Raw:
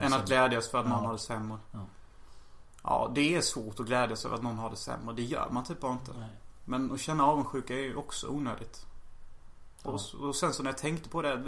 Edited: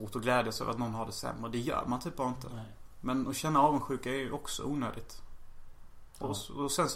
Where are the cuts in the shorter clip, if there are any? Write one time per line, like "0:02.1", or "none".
none